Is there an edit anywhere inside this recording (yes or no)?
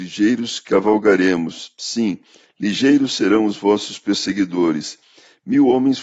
no